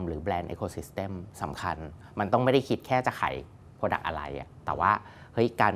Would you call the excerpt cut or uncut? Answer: uncut